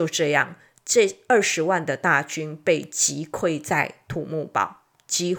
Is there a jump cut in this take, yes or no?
no